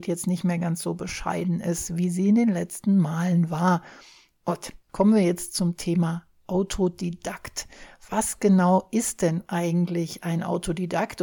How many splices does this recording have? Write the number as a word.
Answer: zero